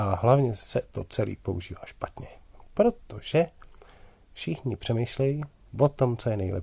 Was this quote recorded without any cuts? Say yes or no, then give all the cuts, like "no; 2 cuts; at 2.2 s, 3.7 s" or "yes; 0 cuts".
yes; 0 cuts